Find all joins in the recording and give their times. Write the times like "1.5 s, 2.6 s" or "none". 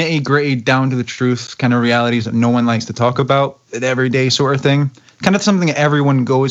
none